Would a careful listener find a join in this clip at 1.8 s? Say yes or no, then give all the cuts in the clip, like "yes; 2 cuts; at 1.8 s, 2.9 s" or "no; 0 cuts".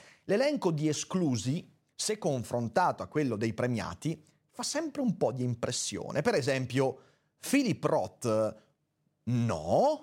no; 0 cuts